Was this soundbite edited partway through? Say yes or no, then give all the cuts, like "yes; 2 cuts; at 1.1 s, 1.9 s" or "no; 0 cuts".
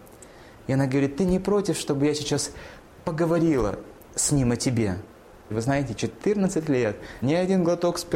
yes; 2 cuts; at 5.5 s, 7.2 s